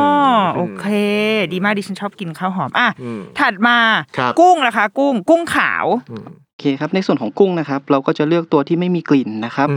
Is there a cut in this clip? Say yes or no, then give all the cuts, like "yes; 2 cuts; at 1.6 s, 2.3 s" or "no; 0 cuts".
no; 0 cuts